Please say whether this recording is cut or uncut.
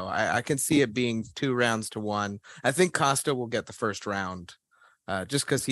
uncut